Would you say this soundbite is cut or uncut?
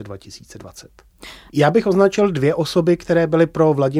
cut